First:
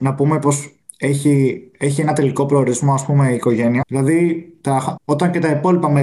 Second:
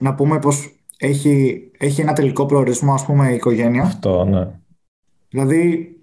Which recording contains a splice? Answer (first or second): first